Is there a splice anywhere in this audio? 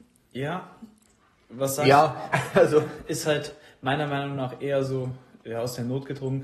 no; 0 cuts

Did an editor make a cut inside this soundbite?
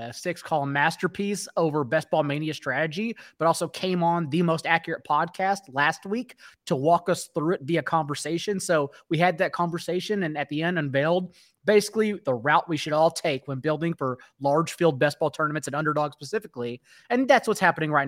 no; 0 cuts

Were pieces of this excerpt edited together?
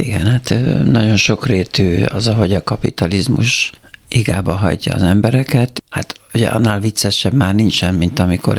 no; 0 cuts

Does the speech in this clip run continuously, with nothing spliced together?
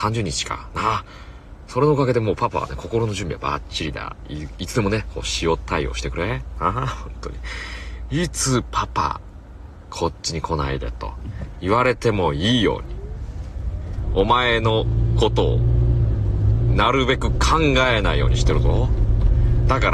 yes; 0 cuts

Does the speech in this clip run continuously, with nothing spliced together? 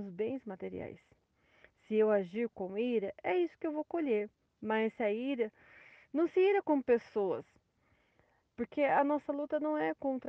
yes; 0 cuts

